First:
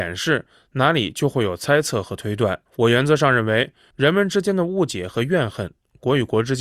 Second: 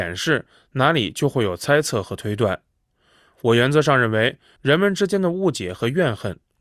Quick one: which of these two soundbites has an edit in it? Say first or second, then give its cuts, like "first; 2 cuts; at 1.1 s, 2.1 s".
first; 1 cut; at 2.7 s